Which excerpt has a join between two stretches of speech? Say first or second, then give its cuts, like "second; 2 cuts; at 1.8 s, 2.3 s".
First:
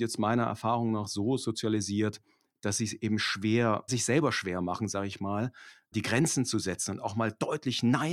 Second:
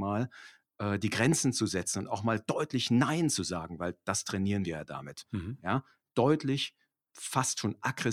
first; 2 cuts; at 3.9 s, 5.9 s